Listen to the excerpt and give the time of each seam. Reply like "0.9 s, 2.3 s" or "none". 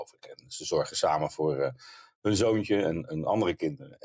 none